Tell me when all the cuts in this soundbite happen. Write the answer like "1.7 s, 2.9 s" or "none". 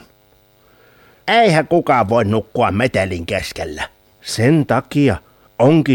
1.2 s, 4.1 s